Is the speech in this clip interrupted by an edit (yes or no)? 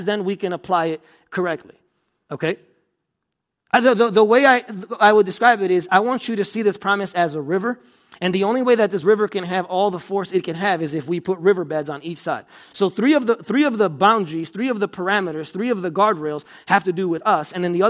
yes